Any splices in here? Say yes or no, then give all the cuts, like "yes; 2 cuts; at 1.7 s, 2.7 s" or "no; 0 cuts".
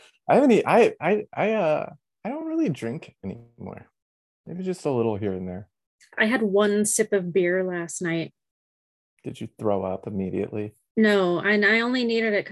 no; 0 cuts